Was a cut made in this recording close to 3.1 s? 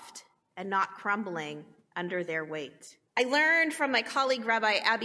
yes; 1 cut; at 3.1 s

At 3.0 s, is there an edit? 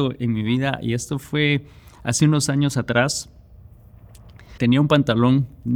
no; 1 cut; at 4.6 s

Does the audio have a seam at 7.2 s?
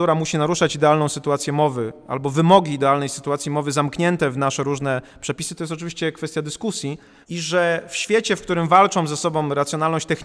yes; 1 cut; at 7.2 s

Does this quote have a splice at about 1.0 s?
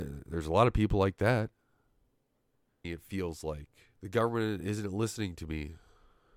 no; 2 cuts; at 2.8 s, 3.9 s

